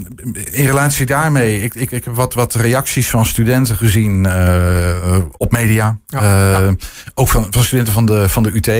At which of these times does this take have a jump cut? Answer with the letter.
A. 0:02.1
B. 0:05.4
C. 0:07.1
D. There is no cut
B